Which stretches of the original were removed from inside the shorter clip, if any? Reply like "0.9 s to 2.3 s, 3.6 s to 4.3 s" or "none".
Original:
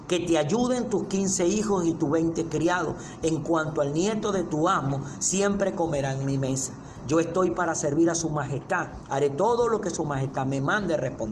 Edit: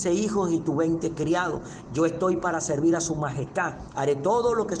3.2 s to 7.0 s